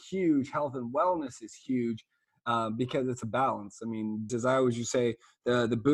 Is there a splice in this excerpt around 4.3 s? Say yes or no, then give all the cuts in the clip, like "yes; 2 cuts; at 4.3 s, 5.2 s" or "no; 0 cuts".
yes; 1 cut; at 4.3 s